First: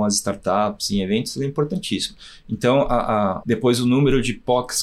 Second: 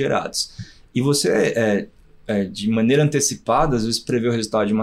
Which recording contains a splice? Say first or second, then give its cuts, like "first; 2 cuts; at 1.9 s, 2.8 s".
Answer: first; 1 cut; at 3.4 s